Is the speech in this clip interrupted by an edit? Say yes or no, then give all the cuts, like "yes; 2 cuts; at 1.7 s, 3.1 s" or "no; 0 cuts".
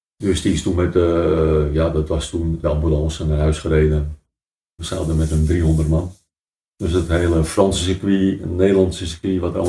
yes; 2 cuts; at 2.6 s, 4.8 s